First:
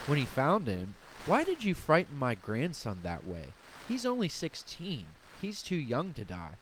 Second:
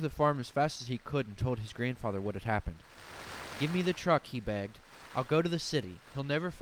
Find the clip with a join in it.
first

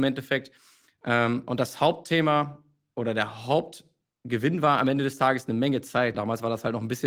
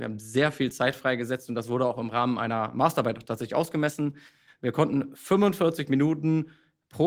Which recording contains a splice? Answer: first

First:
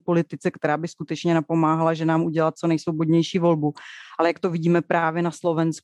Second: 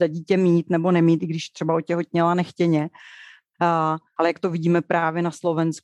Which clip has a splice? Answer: second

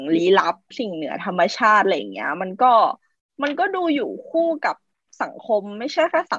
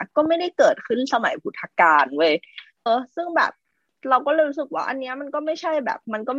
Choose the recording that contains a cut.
second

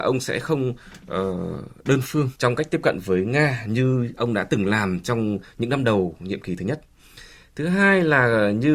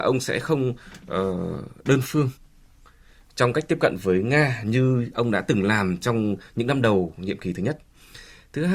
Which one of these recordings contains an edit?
first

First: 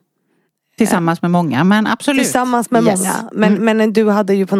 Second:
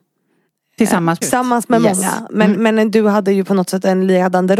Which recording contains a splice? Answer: second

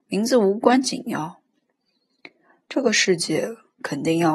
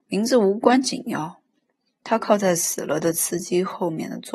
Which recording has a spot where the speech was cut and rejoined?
second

